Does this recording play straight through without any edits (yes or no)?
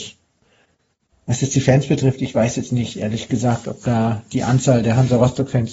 no